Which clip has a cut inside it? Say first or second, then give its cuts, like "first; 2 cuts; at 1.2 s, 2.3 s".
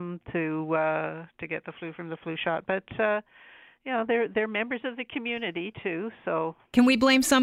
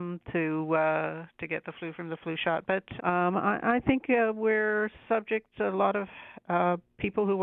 second; 1 cut; at 3.0 s